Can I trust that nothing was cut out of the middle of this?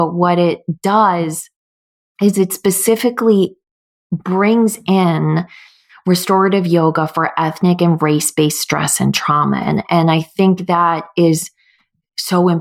yes; 0 cuts

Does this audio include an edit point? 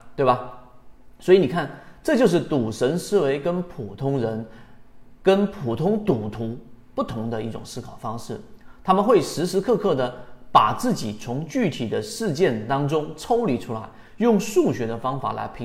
no; 0 cuts

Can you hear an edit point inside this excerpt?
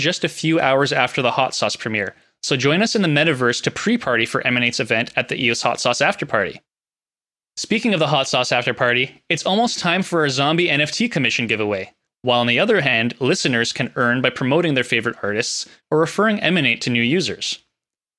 yes; 2 cuts; at 12.1 s, 15.8 s

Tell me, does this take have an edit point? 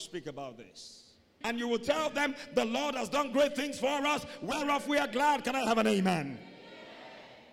yes; 1 cut; at 1.4 s

